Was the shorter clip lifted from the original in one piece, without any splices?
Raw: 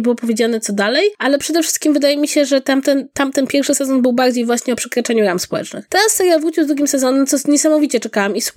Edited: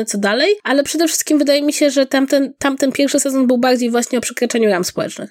yes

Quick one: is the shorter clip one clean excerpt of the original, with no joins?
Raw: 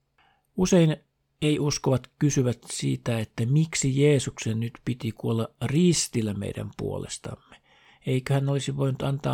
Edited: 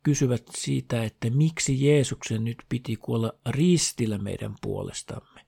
yes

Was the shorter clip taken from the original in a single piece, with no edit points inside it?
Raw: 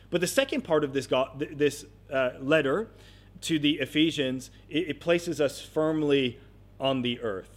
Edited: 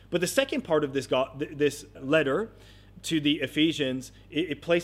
no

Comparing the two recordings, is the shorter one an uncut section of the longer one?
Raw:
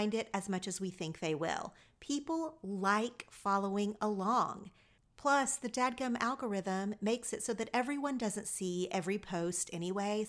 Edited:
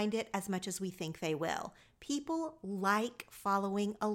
yes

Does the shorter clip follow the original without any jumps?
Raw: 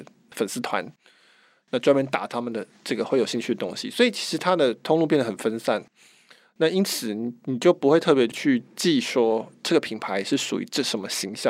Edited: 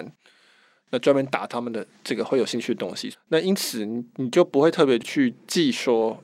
no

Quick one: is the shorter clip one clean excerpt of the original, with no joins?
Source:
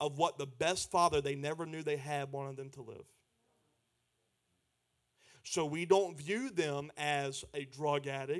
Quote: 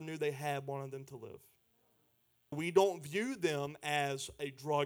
no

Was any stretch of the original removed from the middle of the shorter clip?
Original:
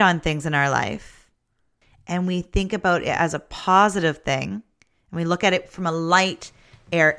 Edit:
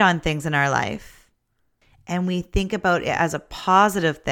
no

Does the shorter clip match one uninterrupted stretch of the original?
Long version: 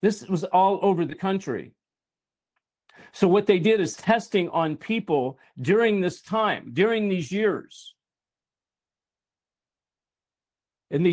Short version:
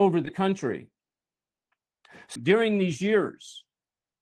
no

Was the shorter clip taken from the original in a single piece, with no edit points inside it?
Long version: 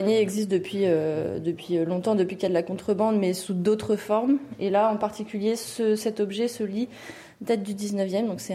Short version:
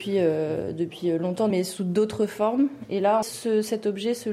no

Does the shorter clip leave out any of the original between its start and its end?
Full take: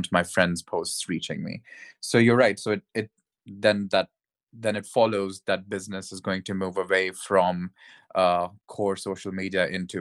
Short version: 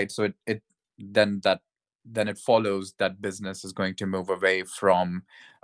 no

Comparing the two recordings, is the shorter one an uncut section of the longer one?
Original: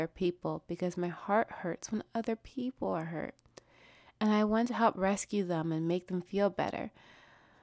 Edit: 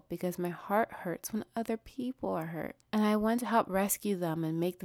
no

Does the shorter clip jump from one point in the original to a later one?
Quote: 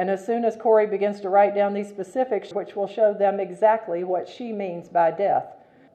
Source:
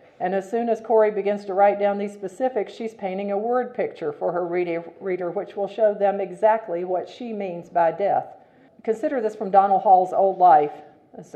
yes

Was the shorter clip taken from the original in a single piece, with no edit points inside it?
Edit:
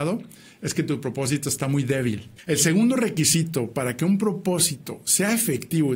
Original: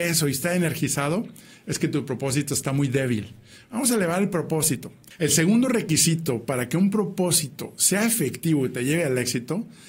no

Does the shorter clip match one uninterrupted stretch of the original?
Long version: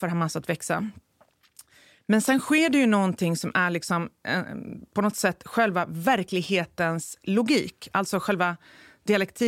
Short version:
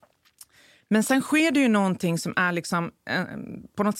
yes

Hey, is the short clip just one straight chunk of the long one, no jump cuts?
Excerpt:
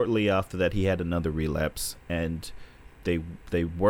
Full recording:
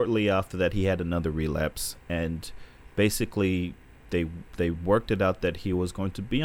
no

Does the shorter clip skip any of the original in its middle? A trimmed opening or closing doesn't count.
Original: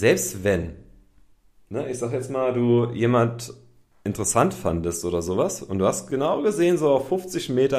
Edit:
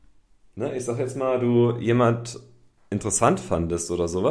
no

